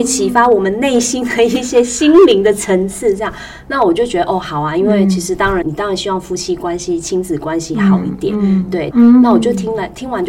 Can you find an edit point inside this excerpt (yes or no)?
yes